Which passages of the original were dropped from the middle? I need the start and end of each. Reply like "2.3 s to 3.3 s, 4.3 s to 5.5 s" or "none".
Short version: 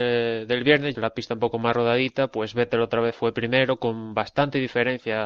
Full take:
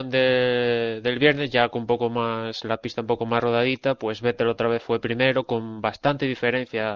1.5 s to 2.6 s